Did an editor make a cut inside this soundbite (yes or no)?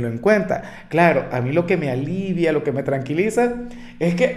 no